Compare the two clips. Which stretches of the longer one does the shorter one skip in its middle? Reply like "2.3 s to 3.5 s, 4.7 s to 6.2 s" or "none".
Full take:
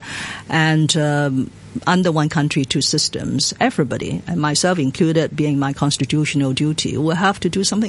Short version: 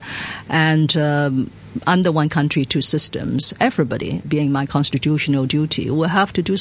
4.2 s to 5.3 s